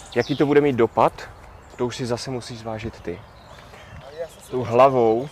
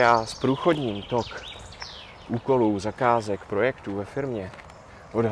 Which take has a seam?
first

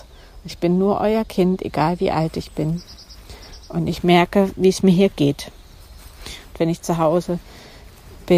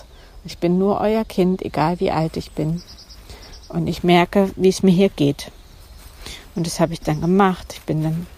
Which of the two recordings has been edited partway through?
first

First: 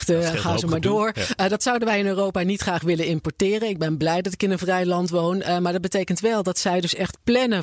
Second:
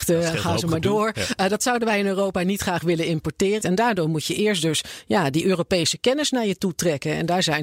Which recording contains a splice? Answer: second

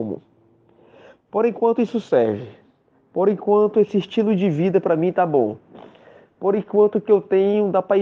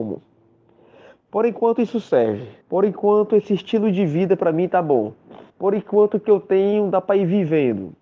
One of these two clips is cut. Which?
second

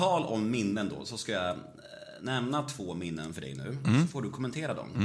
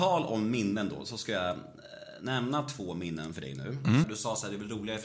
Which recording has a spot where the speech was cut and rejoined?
second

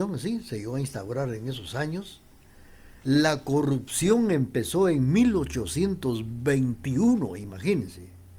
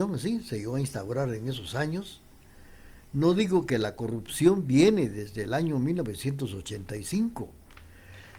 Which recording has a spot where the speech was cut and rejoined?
first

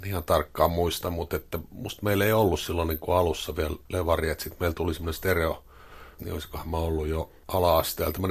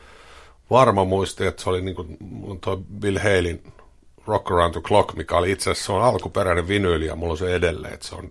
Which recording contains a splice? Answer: first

